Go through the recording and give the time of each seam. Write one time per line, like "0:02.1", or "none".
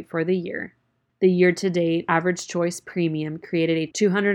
none